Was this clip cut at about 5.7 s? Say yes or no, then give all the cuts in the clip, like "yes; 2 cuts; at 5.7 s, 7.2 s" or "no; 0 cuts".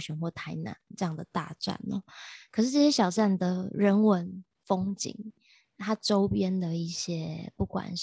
no; 0 cuts